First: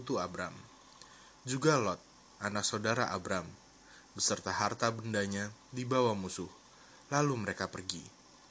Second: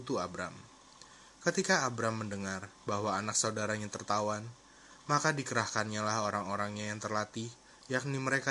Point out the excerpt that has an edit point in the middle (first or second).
first